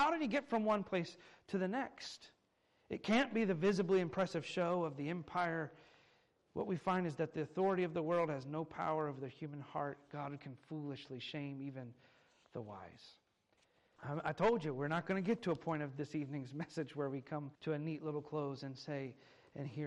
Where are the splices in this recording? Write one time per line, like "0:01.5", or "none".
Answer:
0:14.0
0:17.5